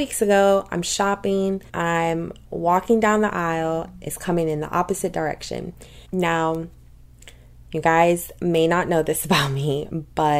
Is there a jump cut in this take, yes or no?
yes